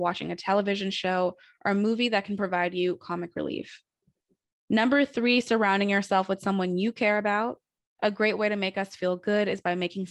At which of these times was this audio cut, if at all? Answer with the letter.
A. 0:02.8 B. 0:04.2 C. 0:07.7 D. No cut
D